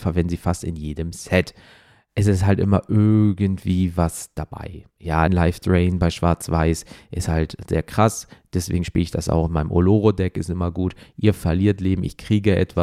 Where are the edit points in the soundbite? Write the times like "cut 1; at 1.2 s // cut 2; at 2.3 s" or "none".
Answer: cut 1; at 5.3 s